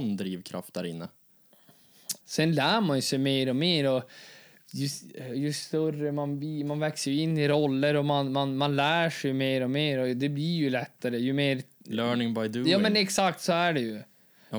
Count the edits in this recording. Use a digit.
1